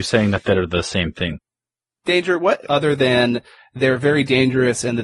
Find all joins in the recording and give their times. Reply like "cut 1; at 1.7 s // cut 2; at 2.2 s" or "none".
cut 1; at 2.6 s